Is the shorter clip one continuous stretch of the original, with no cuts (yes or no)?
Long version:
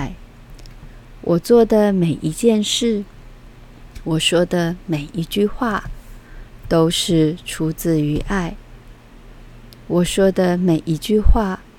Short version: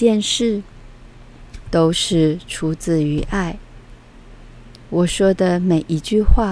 no